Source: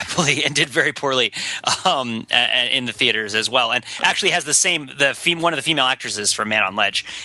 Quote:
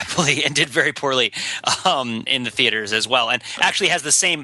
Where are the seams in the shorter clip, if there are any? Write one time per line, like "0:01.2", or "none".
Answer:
0:02.3